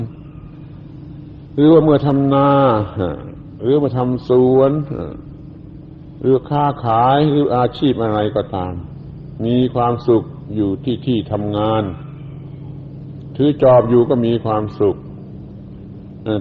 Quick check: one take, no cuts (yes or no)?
yes